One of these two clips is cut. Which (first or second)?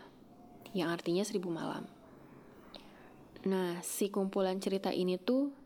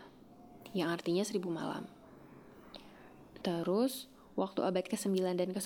second